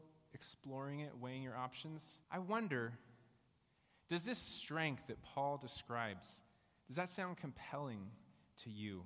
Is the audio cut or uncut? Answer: cut